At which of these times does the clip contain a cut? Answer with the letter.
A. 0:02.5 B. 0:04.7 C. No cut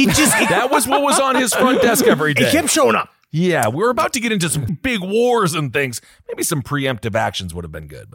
B